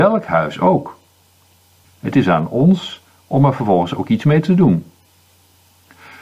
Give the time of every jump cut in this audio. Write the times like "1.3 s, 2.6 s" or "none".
1.8 s